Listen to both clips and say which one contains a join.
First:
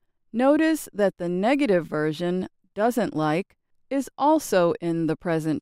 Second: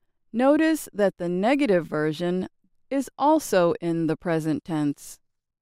second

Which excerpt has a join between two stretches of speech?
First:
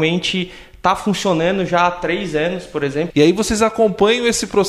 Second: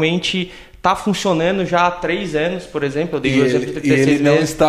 first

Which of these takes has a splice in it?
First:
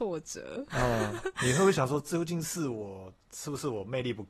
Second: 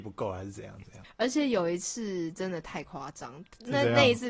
second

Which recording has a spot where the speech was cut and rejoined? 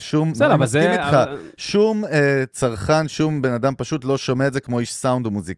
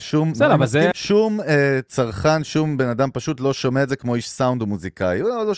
second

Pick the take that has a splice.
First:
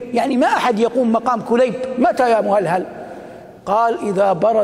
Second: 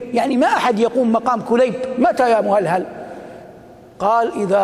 first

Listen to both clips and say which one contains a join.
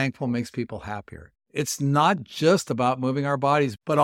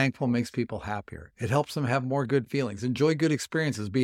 first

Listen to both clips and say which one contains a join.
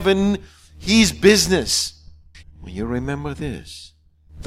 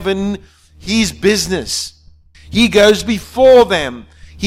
first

